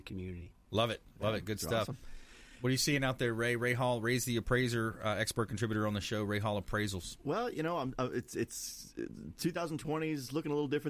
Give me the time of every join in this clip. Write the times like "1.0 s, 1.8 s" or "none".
none